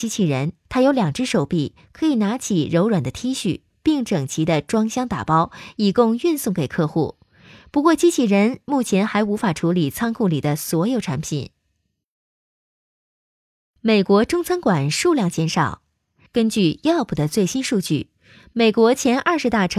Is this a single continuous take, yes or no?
yes